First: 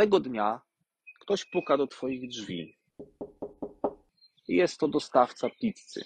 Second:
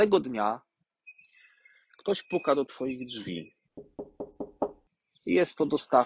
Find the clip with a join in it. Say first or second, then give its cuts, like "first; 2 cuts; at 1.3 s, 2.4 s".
first; 1 cut; at 1.2 s